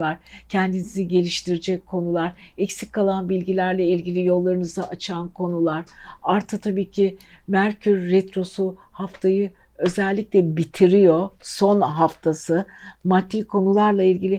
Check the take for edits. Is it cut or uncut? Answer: uncut